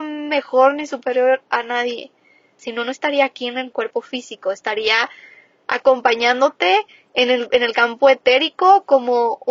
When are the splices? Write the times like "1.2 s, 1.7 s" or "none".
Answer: 2.6 s